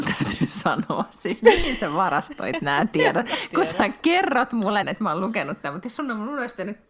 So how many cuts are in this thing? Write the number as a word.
one